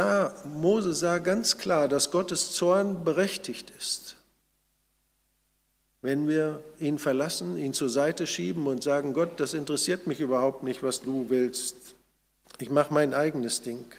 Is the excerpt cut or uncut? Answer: uncut